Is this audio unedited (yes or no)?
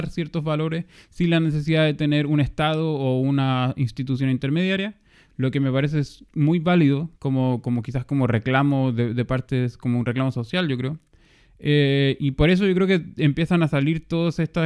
yes